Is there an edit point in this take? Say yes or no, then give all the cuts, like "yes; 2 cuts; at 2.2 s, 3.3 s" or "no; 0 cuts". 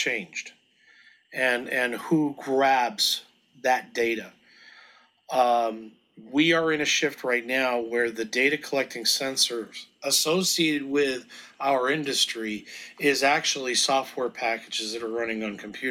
no; 0 cuts